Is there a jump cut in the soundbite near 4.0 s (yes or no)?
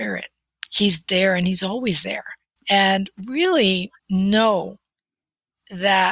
yes